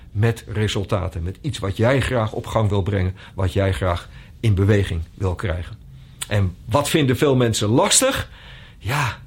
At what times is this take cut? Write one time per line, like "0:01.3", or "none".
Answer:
none